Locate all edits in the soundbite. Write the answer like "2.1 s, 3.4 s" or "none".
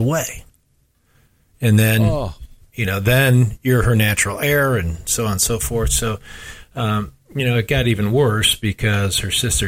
none

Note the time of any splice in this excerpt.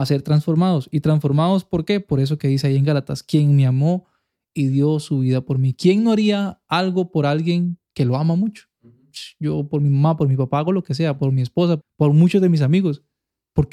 11.8 s

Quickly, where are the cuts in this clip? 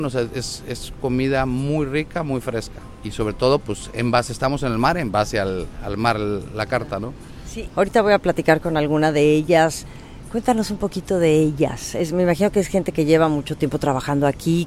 7.7 s

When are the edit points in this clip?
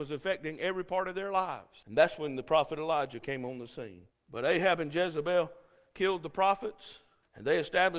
4.1 s

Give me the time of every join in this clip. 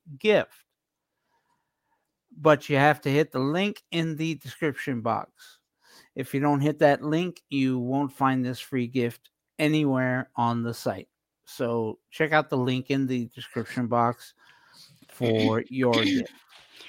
none

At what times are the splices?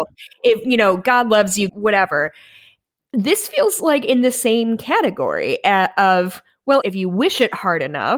1.7 s, 6.8 s

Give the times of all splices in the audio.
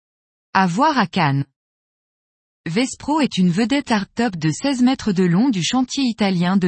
none

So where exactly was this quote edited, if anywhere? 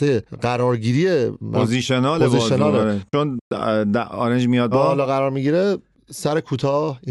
4.7 s

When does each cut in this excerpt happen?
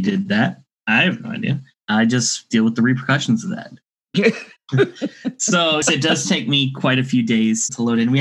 5.8 s

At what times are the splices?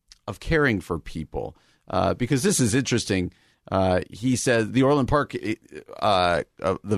none

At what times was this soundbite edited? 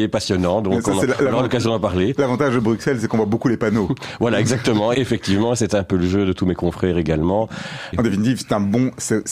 4.9 s, 7.9 s

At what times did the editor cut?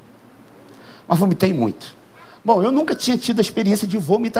none

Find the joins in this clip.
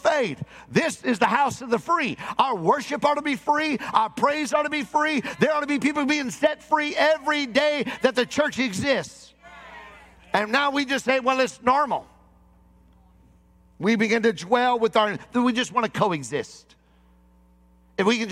none

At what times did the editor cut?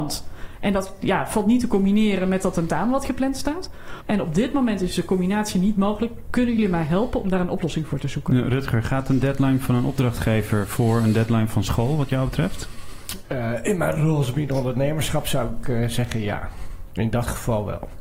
4.0 s

